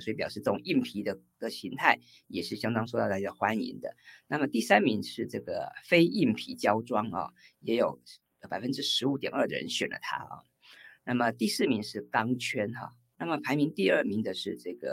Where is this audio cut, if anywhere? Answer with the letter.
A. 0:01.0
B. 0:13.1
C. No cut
B